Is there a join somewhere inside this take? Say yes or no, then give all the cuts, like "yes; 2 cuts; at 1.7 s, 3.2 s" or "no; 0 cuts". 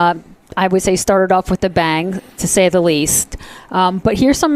no; 0 cuts